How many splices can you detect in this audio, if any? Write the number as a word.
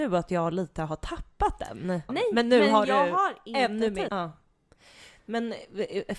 two